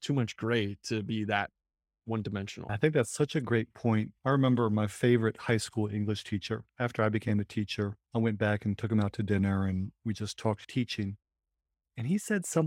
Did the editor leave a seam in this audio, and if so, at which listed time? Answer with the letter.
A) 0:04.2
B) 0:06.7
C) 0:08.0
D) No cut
C